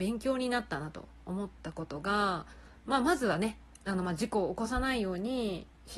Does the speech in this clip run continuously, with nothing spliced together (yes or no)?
yes